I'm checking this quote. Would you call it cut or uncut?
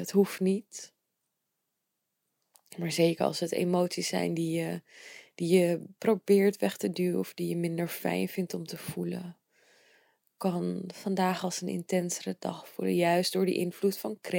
uncut